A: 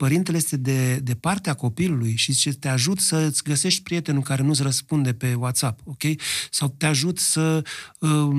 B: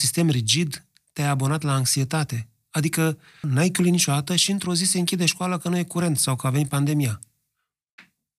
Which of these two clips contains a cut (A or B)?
B